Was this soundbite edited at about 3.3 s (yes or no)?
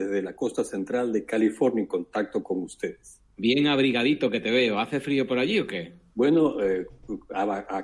yes